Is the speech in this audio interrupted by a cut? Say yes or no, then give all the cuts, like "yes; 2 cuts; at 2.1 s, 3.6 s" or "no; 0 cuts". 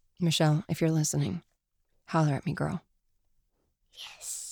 no; 0 cuts